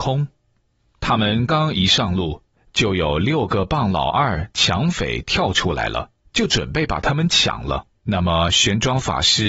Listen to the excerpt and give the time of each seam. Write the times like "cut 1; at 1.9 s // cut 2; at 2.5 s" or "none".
cut 1; at 1.5 s // cut 2; at 7.9 s